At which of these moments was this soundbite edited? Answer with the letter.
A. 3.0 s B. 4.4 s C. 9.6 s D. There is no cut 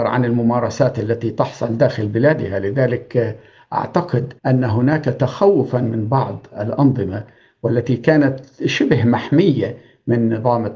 B